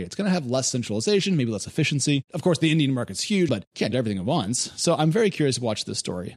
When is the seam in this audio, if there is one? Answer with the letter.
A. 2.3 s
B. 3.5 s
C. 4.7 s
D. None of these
B